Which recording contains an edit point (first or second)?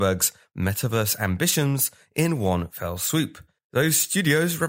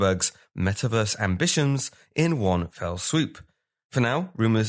first